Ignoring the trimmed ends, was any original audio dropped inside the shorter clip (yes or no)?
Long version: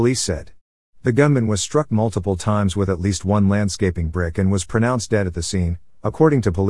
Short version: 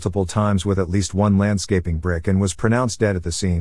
no